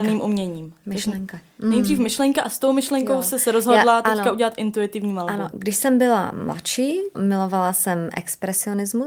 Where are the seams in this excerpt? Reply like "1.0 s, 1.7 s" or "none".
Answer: 5.5 s, 7.1 s